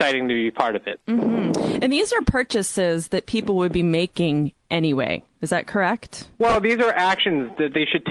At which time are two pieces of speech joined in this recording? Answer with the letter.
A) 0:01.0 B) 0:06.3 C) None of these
B